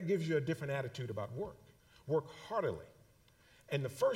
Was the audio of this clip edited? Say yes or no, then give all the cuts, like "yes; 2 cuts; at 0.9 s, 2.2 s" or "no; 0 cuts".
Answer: no; 0 cuts